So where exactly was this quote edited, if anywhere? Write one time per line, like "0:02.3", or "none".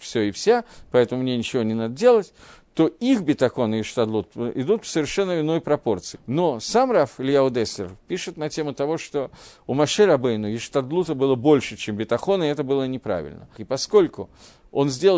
0:06.1
0:13.5